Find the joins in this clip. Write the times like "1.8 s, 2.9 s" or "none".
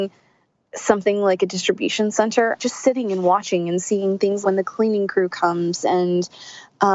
2.6 s, 4.4 s